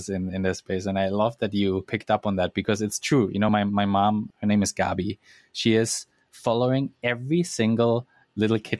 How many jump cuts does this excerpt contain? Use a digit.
0